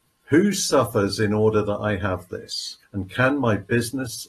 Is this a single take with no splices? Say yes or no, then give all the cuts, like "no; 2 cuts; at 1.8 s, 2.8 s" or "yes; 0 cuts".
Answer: no; 1 cut; at 2.8 s